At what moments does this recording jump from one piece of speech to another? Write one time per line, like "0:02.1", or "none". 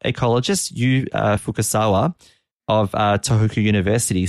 none